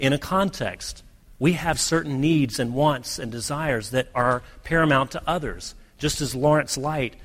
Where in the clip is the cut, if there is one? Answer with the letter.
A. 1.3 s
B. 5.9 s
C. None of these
C